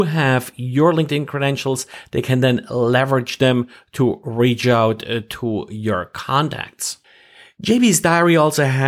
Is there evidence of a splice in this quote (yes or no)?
no